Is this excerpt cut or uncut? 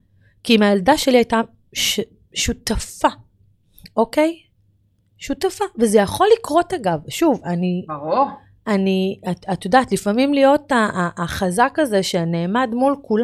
uncut